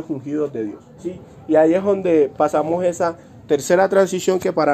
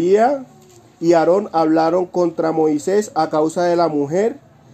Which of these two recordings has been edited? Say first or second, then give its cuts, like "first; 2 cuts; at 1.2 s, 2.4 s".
first; 1 cut; at 1.0 s